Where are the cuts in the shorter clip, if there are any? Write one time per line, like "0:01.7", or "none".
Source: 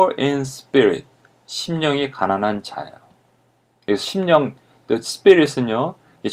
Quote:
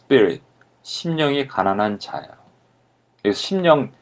none